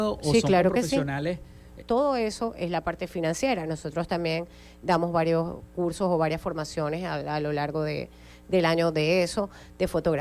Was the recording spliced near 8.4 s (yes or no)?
no